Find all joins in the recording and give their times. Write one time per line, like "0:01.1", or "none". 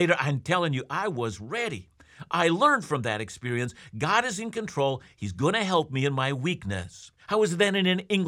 0:07.2

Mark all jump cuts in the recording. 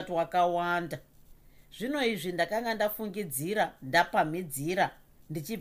none

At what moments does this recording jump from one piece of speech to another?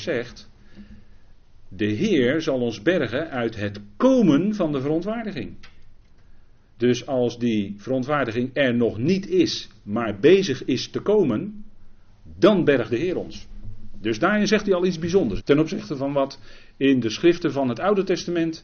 0:15.4

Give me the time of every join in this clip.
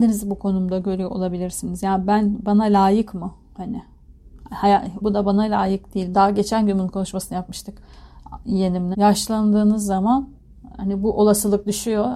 0:05.0
0:06.1
0:08.9

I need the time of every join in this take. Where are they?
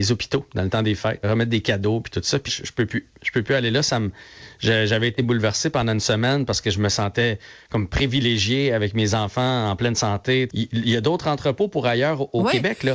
0:01.2
0:02.5
0:10.5

